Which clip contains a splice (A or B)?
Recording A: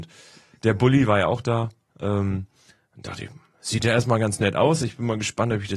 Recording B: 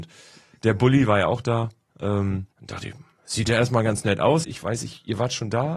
B